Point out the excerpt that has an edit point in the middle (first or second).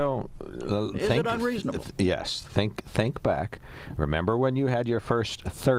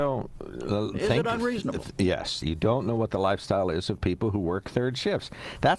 second